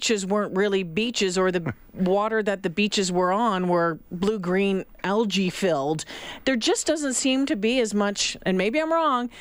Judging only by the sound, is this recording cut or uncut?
uncut